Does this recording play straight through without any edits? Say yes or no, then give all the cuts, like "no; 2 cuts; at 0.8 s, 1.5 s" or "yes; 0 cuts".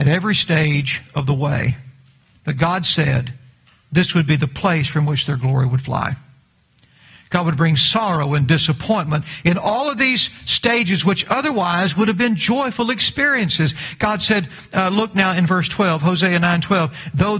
yes; 0 cuts